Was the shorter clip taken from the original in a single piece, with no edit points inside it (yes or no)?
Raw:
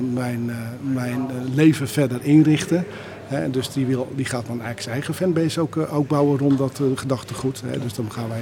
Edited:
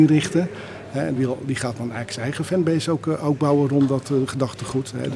no